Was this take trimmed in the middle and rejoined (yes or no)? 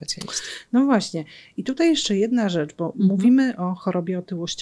no